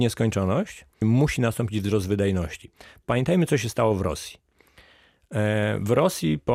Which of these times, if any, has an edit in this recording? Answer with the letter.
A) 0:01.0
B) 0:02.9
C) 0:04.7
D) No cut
A